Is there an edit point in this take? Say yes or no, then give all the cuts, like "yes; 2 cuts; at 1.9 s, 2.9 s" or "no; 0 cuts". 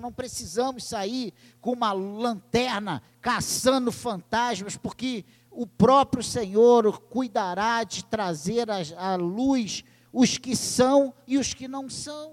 no; 0 cuts